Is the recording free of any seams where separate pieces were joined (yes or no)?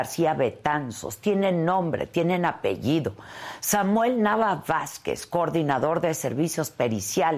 yes